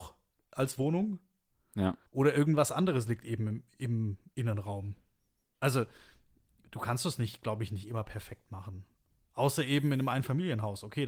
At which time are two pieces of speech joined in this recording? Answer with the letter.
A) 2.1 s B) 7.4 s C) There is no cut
A